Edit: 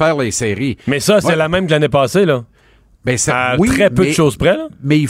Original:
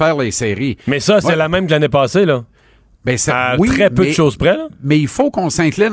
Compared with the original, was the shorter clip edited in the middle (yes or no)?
no